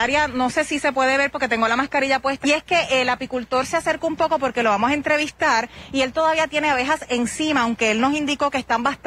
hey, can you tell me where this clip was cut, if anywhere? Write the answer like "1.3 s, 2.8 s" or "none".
2.4 s